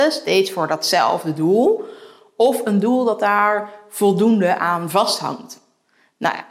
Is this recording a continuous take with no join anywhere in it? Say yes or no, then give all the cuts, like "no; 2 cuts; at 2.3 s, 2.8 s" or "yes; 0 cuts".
yes; 0 cuts